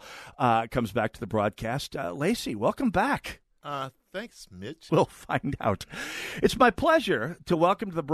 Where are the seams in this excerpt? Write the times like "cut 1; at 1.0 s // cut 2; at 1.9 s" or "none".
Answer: cut 1; at 4.9 s